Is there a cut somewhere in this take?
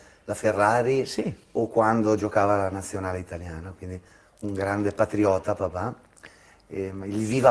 no; 0 cuts

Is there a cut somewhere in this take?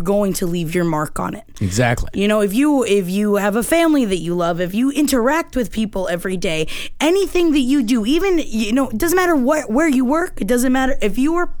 no; 0 cuts

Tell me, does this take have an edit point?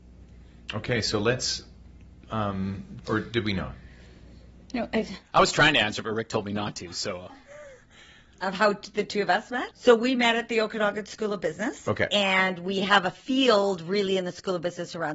yes; 2 cuts; at 3.0 s, 9.7 s

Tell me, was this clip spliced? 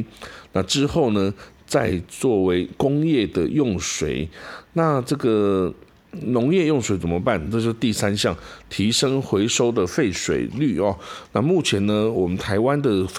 no; 0 cuts

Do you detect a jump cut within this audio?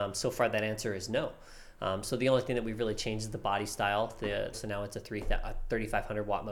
yes; 1 cut; at 4.5 s

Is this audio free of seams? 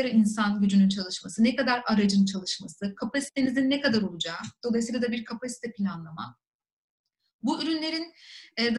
yes; 0 cuts

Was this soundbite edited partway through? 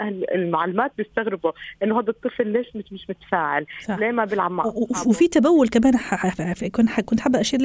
no; 0 cuts

